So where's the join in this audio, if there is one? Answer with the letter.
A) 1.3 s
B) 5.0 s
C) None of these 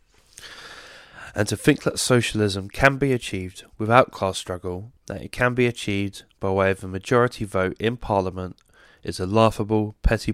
C